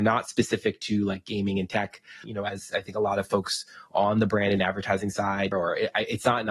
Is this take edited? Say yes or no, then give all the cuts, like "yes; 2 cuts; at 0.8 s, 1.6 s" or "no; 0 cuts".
yes; 2 cuts; at 2.2 s, 5.5 s